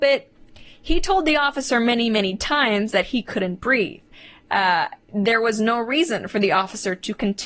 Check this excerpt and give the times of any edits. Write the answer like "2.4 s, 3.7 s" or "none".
none